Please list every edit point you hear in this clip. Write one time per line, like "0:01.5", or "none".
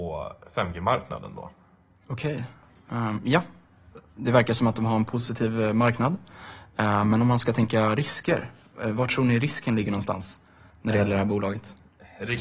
none